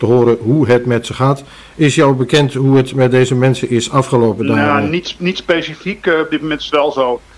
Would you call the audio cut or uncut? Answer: uncut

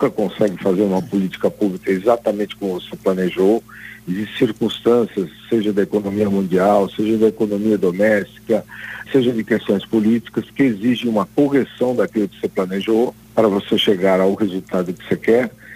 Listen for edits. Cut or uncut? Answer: cut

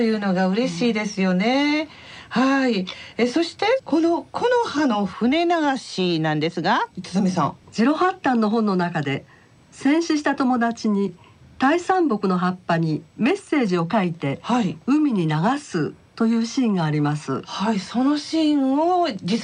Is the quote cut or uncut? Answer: cut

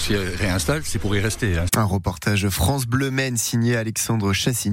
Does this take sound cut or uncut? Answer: cut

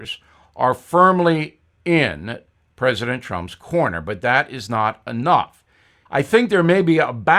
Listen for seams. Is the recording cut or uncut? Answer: cut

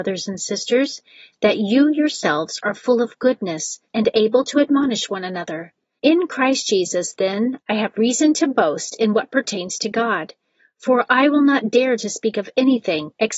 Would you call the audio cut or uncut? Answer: cut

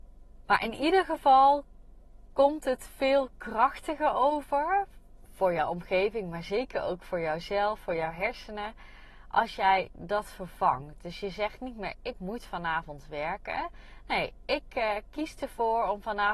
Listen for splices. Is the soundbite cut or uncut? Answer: uncut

